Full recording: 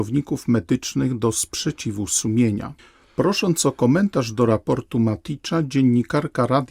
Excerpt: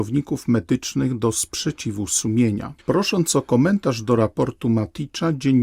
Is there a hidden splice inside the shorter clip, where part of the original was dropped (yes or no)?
yes